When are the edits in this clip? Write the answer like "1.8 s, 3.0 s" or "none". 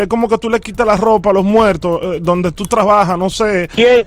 none